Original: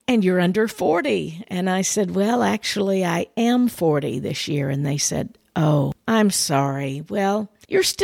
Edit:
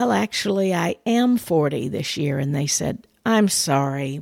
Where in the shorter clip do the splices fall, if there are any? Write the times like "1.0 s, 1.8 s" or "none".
3.2 s